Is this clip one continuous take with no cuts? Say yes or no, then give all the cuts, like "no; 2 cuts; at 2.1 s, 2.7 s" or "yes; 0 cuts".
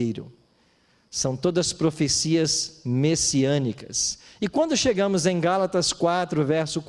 yes; 0 cuts